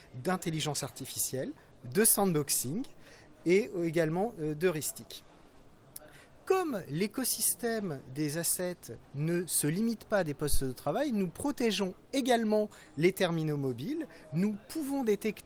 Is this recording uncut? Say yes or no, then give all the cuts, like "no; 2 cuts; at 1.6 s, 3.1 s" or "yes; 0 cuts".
no; 1 cut; at 9.0 s